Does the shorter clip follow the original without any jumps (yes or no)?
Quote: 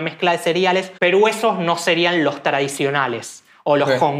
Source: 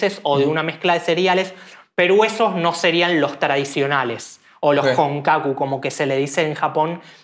no